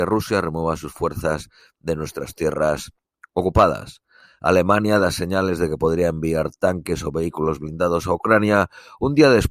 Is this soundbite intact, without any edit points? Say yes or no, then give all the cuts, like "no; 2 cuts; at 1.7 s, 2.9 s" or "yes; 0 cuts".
yes; 0 cuts